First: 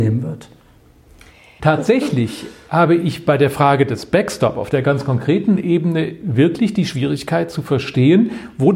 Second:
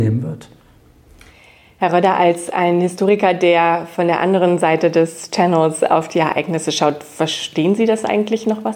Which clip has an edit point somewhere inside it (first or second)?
first